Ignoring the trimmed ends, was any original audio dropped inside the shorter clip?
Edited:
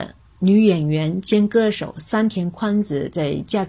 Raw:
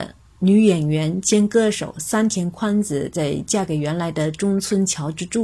no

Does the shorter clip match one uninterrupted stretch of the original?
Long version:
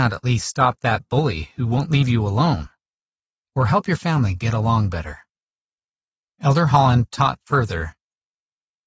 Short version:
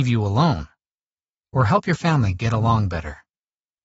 yes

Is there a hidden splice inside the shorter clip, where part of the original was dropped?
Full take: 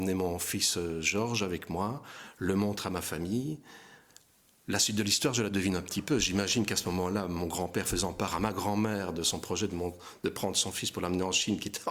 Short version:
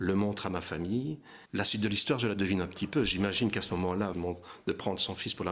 yes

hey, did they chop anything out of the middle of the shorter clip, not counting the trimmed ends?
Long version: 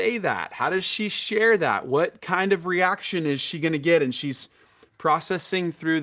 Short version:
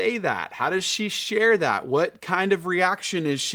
no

